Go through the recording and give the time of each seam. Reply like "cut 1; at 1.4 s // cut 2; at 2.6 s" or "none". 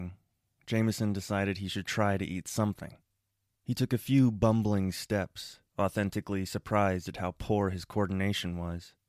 cut 1; at 3.5 s // cut 2; at 5.7 s

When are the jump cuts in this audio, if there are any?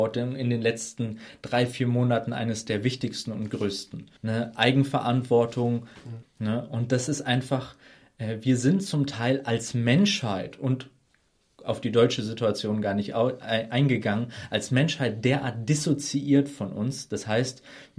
cut 1; at 4.2 s // cut 2; at 6.2 s

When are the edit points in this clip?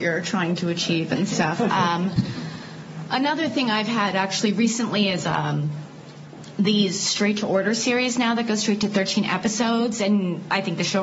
none

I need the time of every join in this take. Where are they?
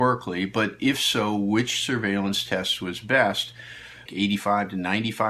cut 1; at 4.1 s

